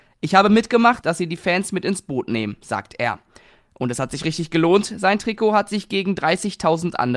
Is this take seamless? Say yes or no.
no